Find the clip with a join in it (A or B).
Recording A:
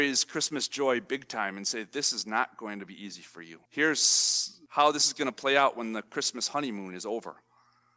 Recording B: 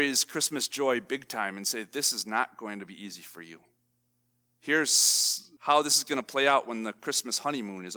A